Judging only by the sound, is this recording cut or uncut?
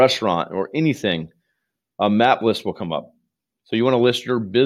uncut